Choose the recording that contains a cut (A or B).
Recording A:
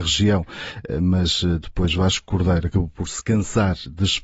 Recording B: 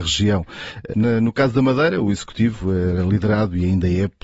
B